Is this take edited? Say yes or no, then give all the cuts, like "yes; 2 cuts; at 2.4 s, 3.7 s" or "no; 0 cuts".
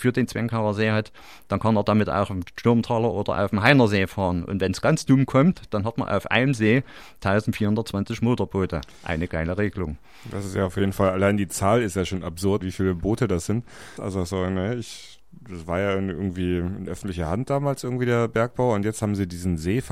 yes; 2 cuts; at 12.6 s, 14.0 s